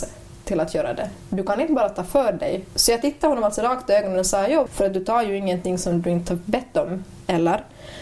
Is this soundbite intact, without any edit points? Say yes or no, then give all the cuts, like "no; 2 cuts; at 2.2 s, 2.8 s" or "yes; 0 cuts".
no; 1 cut; at 4.7 s